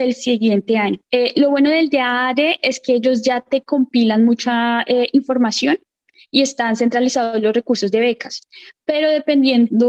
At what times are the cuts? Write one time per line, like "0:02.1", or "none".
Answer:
0:01.1